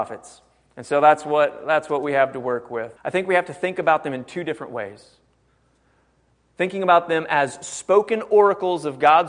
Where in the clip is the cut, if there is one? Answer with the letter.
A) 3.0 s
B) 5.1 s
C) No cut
A